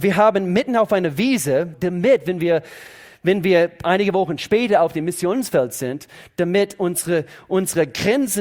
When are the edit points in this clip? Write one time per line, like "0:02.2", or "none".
0:01.7